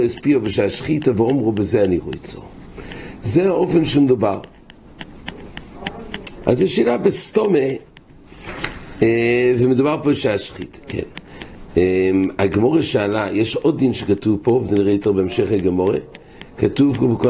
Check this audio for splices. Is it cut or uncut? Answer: cut